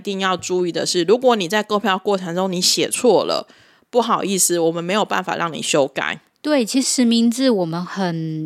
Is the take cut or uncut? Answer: cut